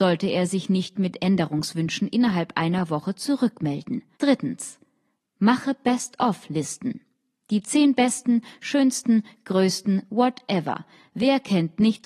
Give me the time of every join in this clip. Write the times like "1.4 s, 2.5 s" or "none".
4.1 s